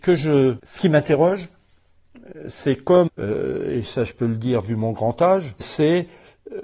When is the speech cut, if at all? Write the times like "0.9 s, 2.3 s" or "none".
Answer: 3.1 s, 5.6 s

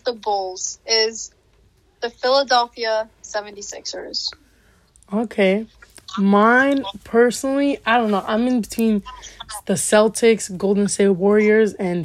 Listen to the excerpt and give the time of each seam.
none

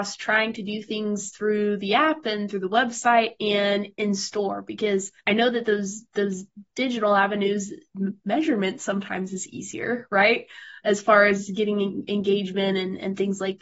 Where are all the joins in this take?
5.2 s

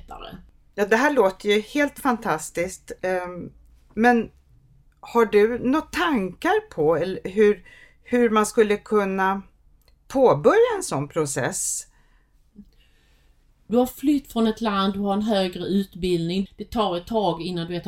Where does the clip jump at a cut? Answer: 13.7 s, 16.5 s

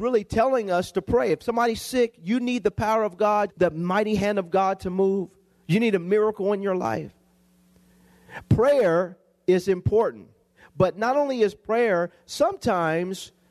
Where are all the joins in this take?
3.5 s

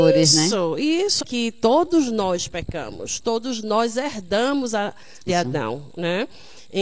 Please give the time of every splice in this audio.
1.2 s, 5.3 s

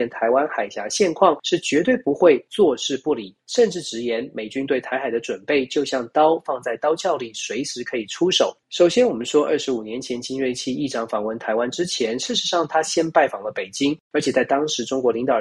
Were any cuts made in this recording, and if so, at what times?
8.6 s

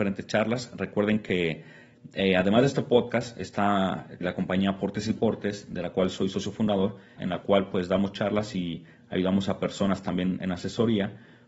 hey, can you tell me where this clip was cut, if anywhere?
4.2 s, 7.2 s, 10.4 s

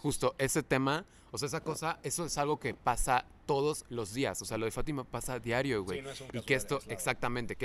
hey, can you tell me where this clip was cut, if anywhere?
none

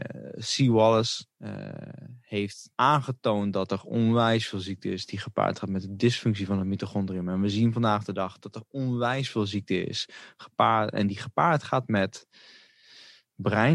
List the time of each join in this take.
1.3 s, 2.7 s

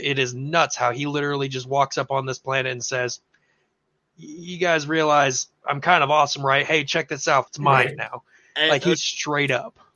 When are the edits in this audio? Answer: 7.5 s

